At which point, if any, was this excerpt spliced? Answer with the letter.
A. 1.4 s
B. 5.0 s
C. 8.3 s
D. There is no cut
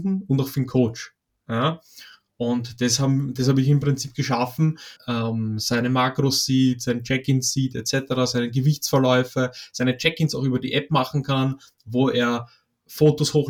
B